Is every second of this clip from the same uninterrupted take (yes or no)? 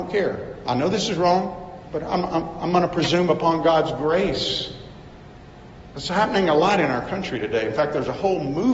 yes